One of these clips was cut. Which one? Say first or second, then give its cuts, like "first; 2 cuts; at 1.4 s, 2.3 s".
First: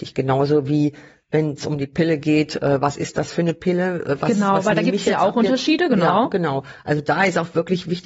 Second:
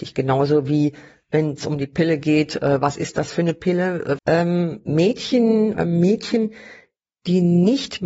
second; 2 cuts; at 4.2 s, 5.7 s